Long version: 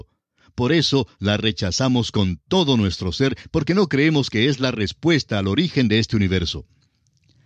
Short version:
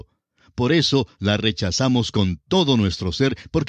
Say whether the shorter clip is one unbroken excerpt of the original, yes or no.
yes